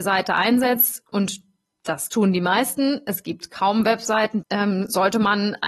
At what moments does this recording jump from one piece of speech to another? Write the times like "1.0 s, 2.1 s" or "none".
4.4 s